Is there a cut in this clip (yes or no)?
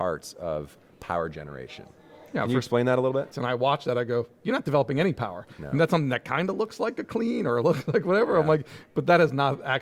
yes